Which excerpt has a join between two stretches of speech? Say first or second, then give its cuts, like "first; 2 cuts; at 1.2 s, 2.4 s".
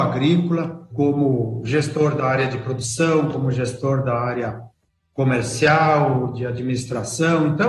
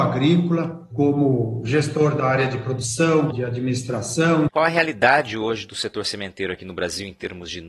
second; 2 cuts; at 3.3 s, 4.5 s